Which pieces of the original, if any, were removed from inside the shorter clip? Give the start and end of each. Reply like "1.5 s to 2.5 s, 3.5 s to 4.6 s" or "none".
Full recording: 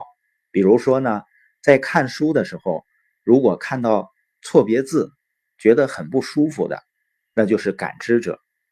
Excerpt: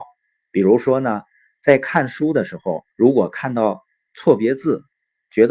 2.9 s to 3.2 s